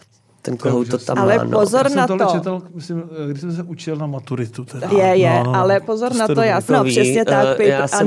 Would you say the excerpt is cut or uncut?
cut